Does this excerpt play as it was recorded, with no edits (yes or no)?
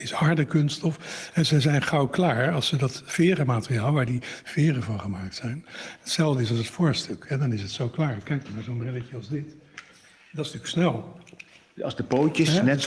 yes